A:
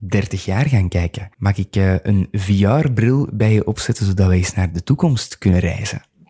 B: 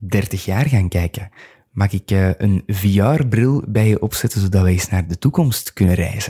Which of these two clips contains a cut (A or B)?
A